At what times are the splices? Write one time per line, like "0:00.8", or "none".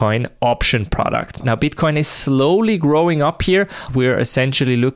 0:01.4
0:03.9